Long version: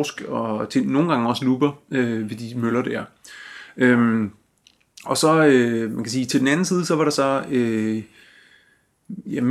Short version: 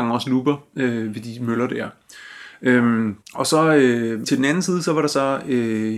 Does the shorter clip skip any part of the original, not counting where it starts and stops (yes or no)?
yes